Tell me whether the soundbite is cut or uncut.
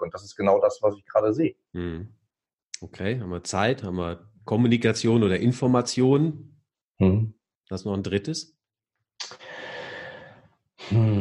cut